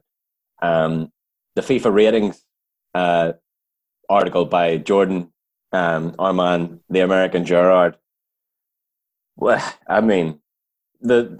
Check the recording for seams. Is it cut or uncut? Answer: cut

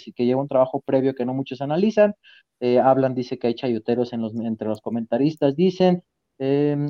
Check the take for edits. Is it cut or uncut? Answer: uncut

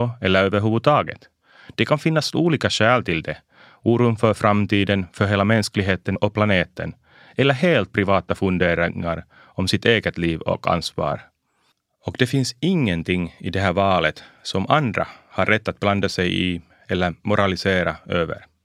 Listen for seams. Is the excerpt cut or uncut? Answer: uncut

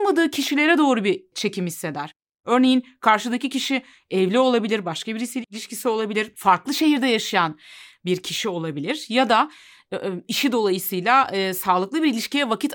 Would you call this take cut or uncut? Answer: uncut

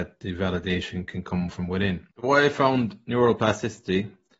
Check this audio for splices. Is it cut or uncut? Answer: cut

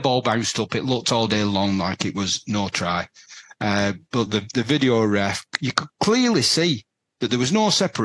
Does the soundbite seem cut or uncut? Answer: uncut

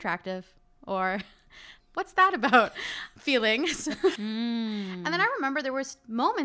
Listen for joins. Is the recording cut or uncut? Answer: cut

